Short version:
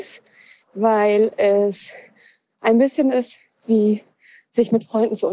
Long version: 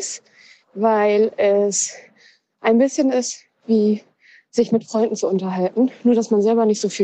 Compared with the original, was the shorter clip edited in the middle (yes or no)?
no